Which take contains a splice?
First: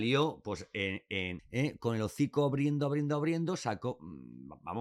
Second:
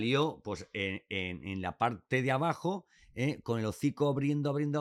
first; 1 cut; at 1.4 s

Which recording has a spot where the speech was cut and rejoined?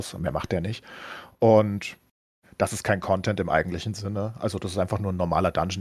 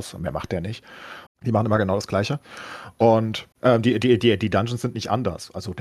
second; 2 cuts; at 1.3 s, 3.5 s

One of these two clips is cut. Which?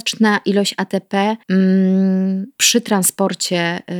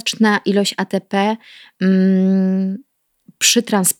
first; 2 cuts; at 1.4 s, 2.5 s

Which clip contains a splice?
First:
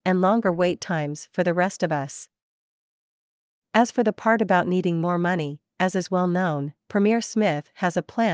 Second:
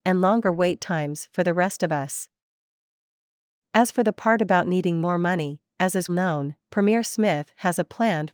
second; 1 cut; at 6.1 s

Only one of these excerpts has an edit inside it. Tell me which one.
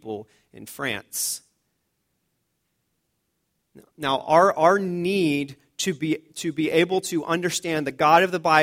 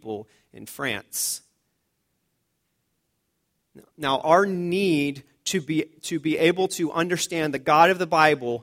second; 1 cut; at 4.2 s

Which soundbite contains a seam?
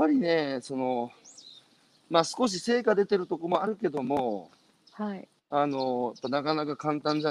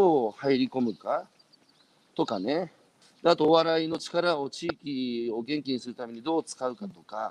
second; 1 cut; at 3.0 s

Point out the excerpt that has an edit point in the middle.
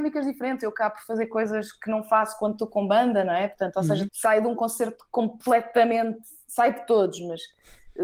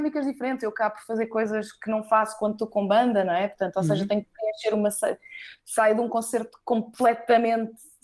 first; 1 cut; at 4.1 s

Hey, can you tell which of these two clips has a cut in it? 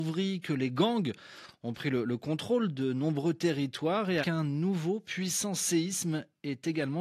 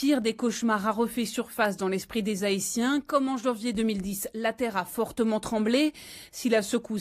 first; 1 cut; at 4.2 s

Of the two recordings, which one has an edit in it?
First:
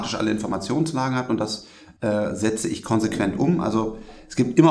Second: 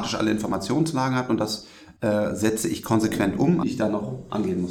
second; 1 cut; at 3.6 s

